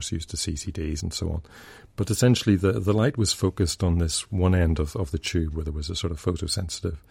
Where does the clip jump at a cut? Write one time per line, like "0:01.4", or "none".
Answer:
0:01.0